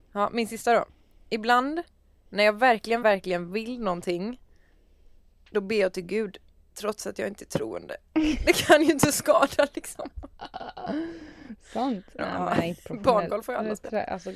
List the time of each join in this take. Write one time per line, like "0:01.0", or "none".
0:03.0
0:12.2